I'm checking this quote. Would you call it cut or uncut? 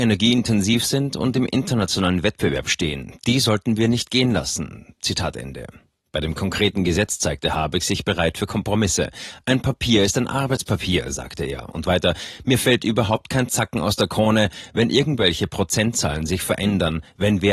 uncut